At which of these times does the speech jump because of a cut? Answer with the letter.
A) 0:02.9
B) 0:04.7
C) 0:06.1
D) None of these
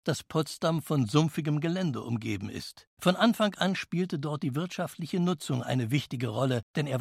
A